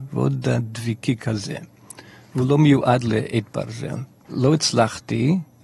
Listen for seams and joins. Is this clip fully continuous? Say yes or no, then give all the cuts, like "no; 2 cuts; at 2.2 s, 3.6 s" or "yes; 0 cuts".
no; 1 cut; at 4.2 s